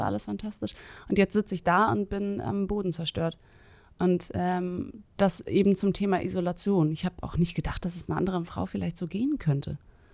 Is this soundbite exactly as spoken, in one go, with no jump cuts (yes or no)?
yes